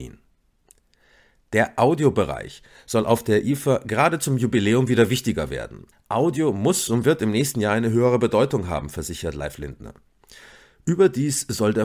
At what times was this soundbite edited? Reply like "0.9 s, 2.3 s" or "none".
5.9 s